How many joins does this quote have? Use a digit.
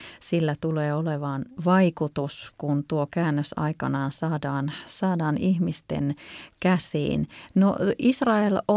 1